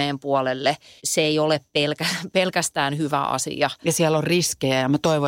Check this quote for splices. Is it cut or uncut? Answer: cut